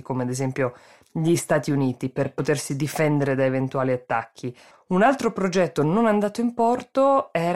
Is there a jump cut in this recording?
yes; 1 cut; at 4.7 s

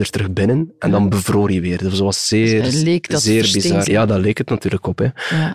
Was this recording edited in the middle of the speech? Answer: yes; 2 cuts; at 1.8 s, 3.9 s

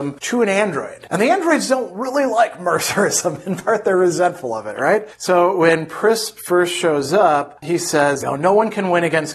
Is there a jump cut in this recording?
no; 0 cuts

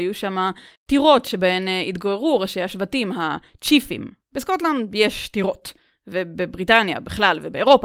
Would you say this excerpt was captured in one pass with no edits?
yes; 0 cuts

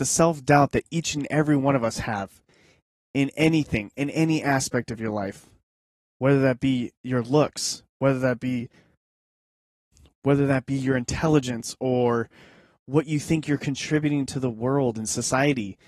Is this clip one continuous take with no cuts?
yes; 0 cuts

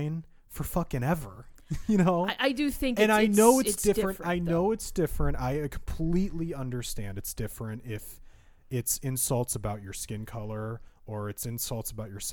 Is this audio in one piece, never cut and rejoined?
yes; 0 cuts

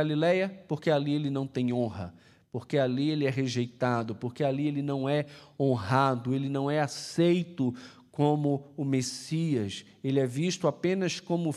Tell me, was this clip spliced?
no; 0 cuts

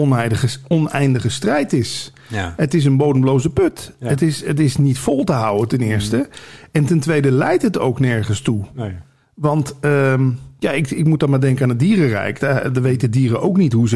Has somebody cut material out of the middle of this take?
no; 0 cuts

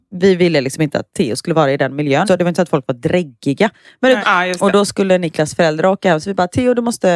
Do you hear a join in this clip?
yes; 2 cuts; at 2.2 s, 4.2 s

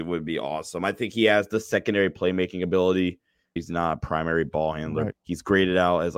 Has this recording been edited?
yes; 2 cuts; at 3.6 s, 5.1 s

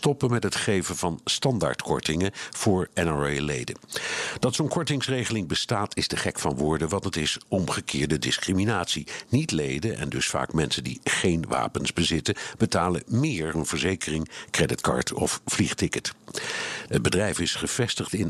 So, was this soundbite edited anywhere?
yes; 2 cuts; at 13.5 s, 16.9 s

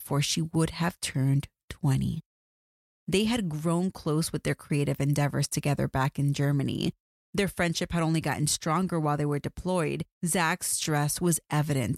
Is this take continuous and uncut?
no; 2 cuts; at 2.9 s, 10.2 s

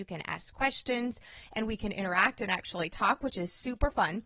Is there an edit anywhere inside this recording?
no; 0 cuts

